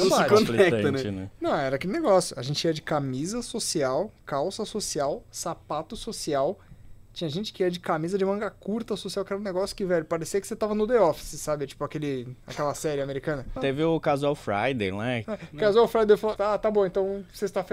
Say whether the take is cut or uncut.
cut